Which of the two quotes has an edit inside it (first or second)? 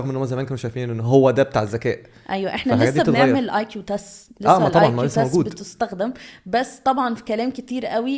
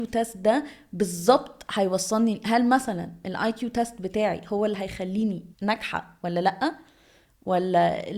second